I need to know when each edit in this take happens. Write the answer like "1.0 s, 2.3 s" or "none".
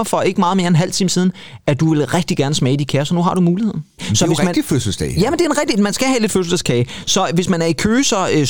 none